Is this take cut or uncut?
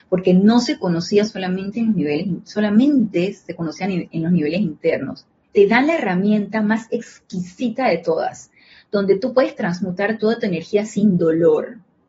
cut